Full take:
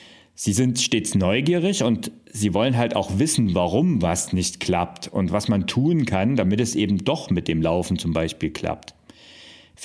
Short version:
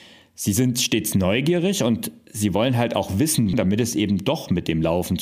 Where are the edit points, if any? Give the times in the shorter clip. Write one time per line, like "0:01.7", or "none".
0:03.5